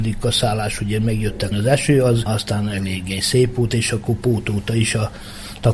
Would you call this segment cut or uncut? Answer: cut